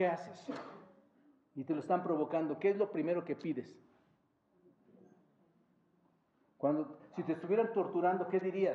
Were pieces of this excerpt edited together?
no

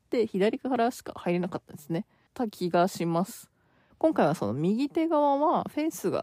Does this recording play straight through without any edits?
no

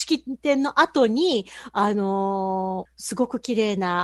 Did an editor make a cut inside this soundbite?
yes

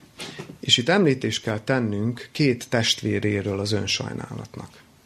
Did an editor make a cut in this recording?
no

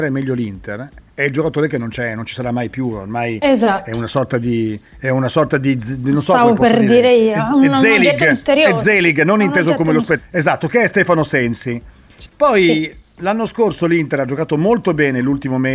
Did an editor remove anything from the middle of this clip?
yes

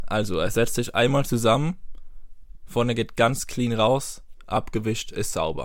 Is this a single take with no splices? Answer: yes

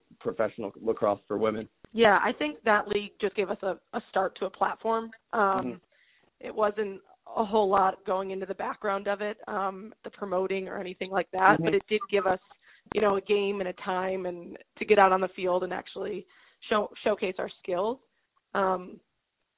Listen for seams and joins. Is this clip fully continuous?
yes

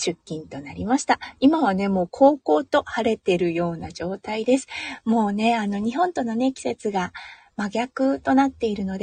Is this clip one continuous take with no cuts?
yes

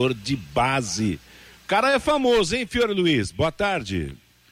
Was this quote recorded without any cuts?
yes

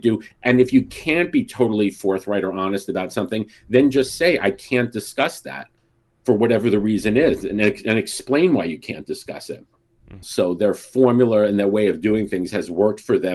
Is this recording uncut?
no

